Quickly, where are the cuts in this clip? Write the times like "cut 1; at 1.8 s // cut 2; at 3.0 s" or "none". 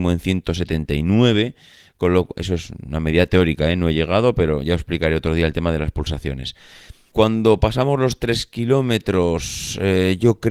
cut 1; at 7.1 s